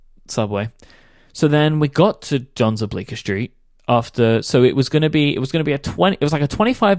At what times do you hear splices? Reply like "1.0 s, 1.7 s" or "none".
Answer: none